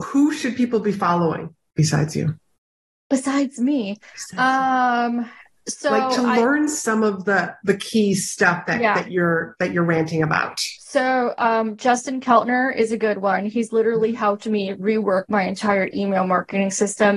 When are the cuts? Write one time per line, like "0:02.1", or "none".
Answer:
none